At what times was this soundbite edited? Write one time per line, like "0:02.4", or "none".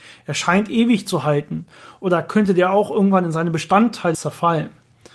0:04.1